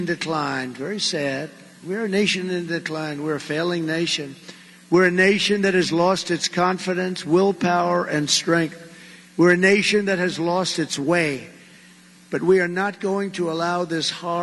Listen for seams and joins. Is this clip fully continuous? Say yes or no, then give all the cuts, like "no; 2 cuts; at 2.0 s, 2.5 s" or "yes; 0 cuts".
yes; 0 cuts